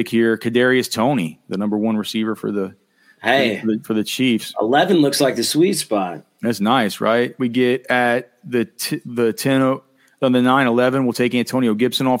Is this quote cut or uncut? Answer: uncut